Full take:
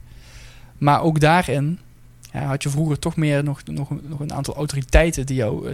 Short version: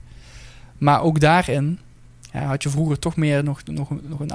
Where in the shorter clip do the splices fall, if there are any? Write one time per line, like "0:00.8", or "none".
none